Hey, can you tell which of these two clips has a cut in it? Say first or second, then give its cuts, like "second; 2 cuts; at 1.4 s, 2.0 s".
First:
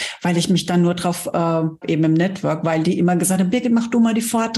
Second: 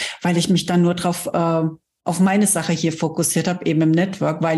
first; 1 cut; at 1.8 s